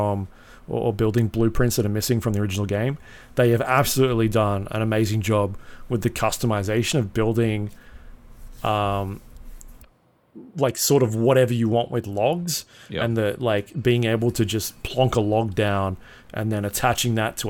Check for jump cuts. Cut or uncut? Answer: uncut